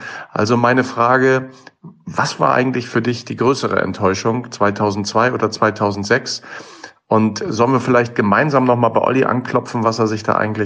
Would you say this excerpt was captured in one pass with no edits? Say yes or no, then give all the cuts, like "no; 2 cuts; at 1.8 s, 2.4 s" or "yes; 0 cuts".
yes; 0 cuts